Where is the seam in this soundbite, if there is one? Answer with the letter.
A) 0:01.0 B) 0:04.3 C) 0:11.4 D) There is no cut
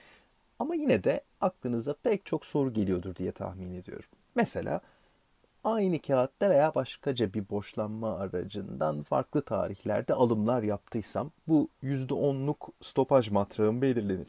C